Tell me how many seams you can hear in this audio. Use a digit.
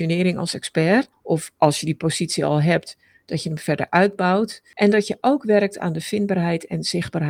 0